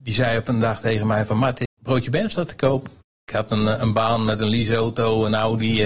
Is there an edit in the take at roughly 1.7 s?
yes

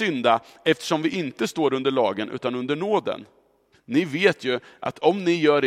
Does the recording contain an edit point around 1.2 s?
no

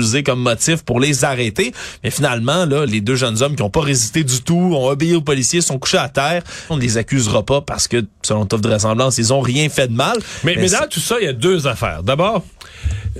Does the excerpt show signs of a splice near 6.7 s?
yes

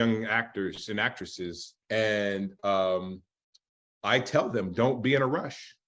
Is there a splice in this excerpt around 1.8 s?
yes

